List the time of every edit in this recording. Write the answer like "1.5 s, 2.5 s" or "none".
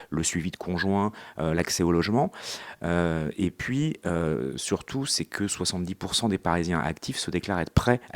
none